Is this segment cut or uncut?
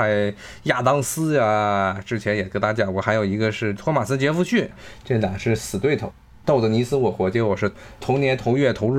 uncut